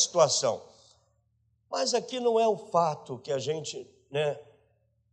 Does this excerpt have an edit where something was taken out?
no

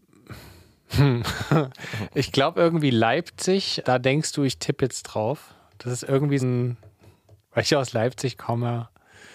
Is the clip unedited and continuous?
no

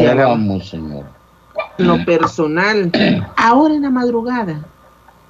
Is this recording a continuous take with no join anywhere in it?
no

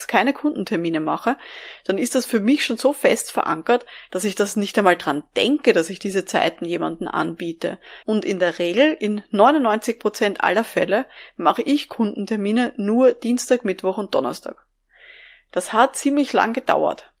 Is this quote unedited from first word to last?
no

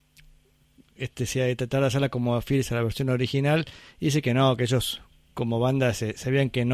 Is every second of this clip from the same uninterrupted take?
yes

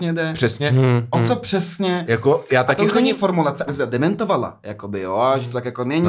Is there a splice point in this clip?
yes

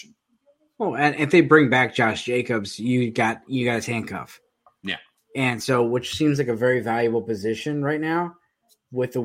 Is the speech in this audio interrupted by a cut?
no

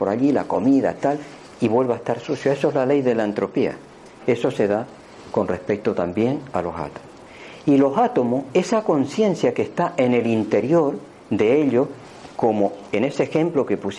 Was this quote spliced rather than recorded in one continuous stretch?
no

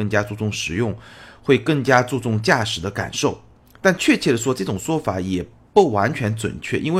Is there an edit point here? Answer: no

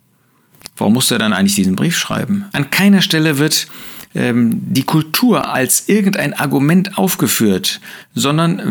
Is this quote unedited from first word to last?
no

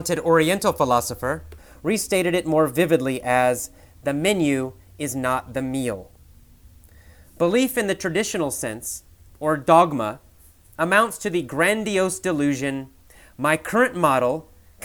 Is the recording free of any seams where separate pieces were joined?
no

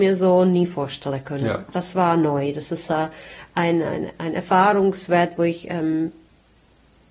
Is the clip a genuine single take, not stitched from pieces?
yes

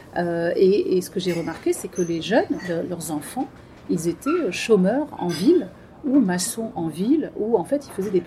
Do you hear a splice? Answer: no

